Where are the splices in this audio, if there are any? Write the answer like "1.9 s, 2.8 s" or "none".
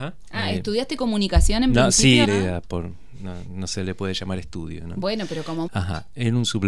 2.2 s, 5.7 s